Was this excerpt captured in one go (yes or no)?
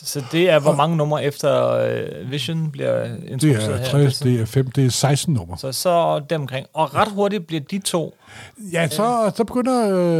no